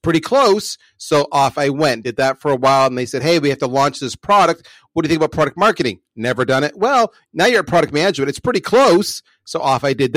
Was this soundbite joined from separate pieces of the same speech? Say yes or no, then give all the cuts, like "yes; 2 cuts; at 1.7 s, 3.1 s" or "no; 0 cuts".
no; 0 cuts